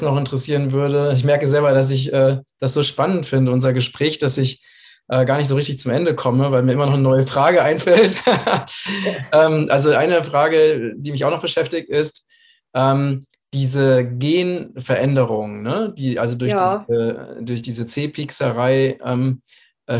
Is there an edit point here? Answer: no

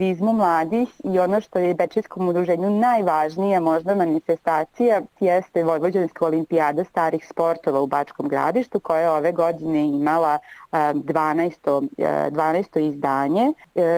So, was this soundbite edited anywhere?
no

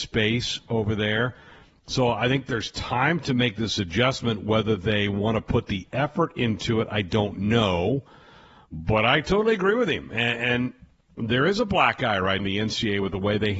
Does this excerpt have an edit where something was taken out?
yes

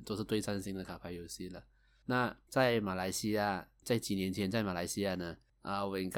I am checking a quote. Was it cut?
no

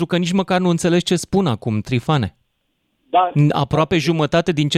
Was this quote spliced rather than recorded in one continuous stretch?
no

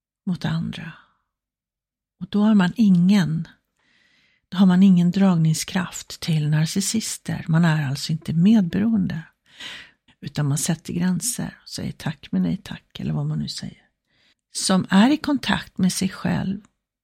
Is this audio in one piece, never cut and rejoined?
no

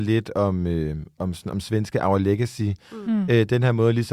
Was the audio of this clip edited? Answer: no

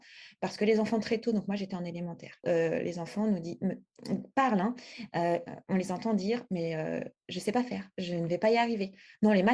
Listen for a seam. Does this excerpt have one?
yes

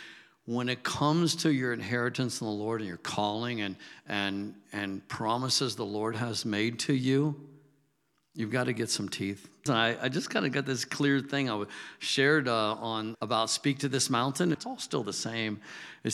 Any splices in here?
yes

